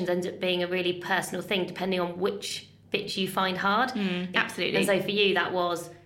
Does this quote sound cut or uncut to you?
cut